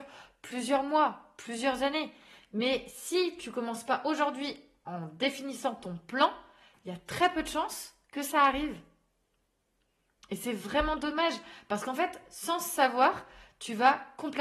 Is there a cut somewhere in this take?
no; 0 cuts

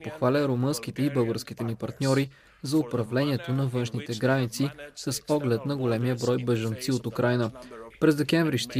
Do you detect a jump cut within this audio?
yes; 1 cut; at 7.9 s

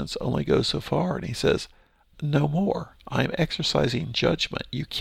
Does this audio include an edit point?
no; 0 cuts

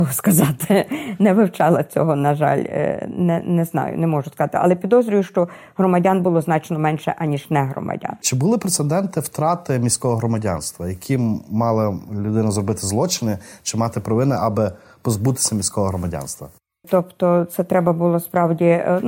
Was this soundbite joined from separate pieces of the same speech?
yes; 1 cut; at 16.8 s

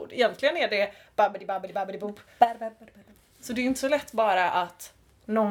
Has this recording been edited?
no; 0 cuts

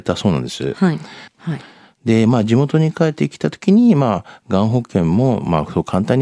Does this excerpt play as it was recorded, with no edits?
no; 1 cut; at 1.3 s

